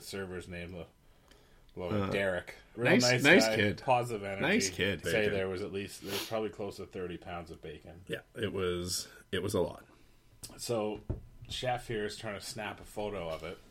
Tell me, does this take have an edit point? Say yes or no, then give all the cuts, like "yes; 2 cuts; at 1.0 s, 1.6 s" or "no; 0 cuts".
yes; 2 cuts; at 2.7 s, 5.0 s